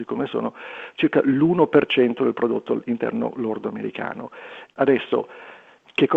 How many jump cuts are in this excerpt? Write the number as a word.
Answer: one